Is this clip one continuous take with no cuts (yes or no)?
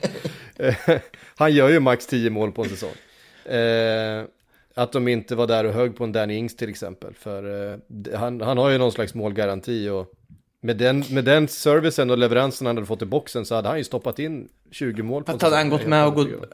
yes